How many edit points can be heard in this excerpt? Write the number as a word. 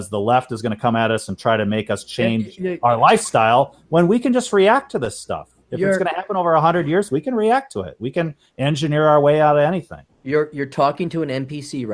zero